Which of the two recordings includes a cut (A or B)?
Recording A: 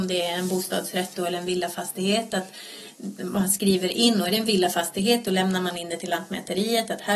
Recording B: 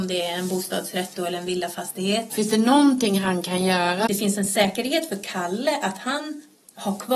B